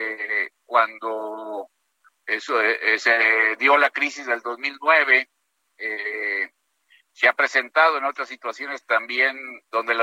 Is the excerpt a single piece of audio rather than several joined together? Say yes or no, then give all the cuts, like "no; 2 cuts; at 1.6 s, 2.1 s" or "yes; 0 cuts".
yes; 0 cuts